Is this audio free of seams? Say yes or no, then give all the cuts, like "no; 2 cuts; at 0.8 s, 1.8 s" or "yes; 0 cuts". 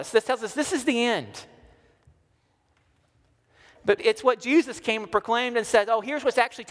no; 1 cut; at 4.0 s